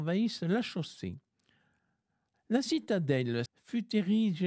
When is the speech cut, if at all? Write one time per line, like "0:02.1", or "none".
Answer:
0:02.3
0:03.5